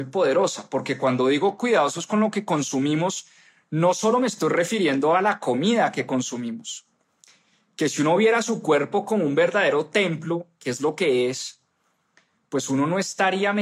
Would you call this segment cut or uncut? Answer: uncut